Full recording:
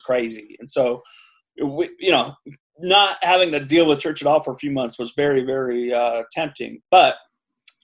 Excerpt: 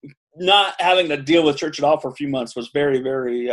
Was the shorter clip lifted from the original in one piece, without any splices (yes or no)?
yes